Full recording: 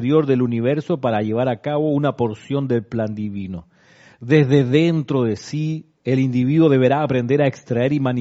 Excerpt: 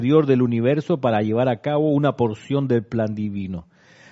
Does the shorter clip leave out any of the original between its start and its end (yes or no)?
no